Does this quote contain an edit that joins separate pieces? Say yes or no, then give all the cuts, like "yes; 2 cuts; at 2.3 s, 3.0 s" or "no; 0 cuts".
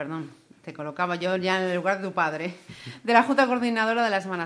no; 0 cuts